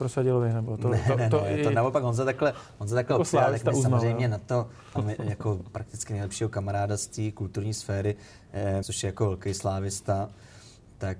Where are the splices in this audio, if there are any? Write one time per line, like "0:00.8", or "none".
0:05.0
0:08.8